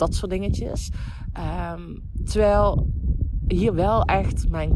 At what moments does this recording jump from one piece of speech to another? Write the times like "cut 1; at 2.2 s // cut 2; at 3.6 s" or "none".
none